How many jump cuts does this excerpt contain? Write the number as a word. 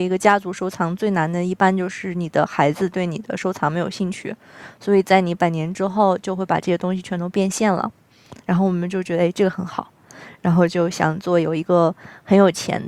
zero